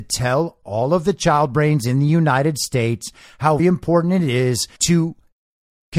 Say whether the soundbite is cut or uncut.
cut